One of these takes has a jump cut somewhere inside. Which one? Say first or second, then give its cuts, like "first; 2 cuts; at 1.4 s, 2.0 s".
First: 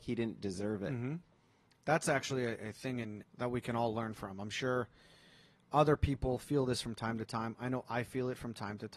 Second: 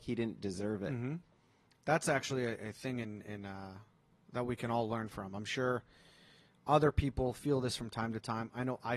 first; 1 cut; at 3.2 s